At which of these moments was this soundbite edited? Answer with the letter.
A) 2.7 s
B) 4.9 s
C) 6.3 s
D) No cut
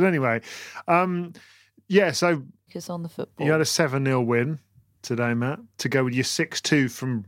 A